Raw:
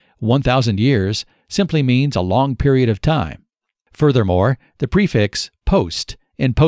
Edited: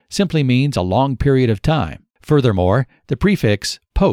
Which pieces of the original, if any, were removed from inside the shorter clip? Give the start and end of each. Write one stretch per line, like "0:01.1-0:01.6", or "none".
0:03.5-0:03.8